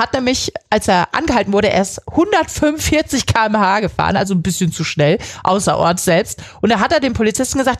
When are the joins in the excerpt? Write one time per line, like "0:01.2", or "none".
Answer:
none